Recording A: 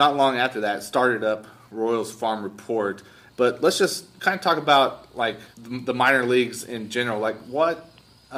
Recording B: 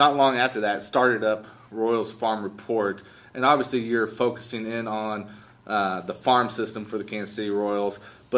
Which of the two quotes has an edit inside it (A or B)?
A